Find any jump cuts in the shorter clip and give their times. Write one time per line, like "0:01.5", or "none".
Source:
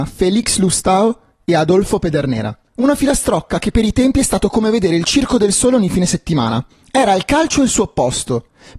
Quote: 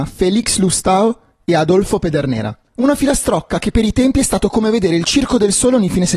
none